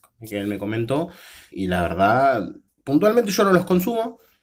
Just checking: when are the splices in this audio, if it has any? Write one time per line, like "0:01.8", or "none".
0:01.5
0:02.7